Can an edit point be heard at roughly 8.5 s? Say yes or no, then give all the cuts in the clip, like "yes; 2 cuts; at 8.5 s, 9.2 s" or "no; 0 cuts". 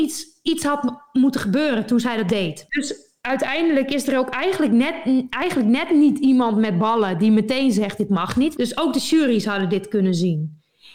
yes; 2 cuts; at 2.7 s, 8.5 s